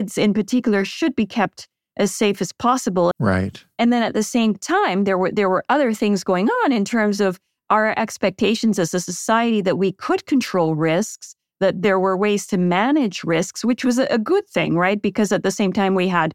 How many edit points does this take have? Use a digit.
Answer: 1